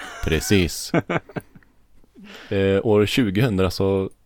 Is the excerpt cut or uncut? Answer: uncut